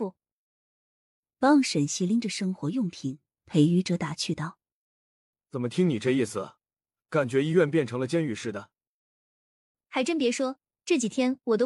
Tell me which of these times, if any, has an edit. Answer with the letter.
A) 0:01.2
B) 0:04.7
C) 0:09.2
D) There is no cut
D